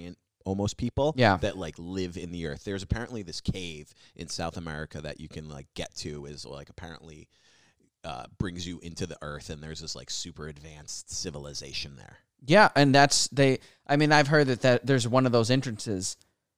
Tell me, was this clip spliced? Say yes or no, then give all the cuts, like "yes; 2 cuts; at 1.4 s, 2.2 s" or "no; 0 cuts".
no; 0 cuts